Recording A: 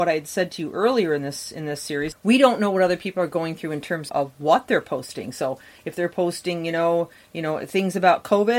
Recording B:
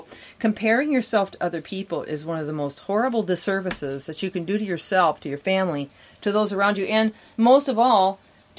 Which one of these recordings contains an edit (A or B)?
A